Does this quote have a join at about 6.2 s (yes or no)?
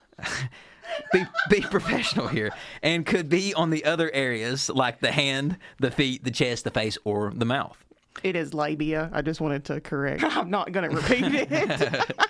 no